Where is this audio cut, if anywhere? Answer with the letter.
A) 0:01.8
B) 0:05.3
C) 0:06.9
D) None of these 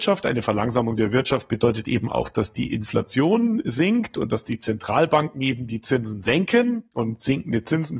D